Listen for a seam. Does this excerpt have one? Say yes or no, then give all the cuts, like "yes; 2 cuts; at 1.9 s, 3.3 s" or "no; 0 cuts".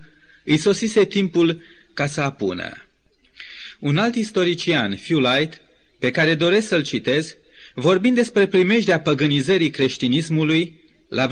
no; 0 cuts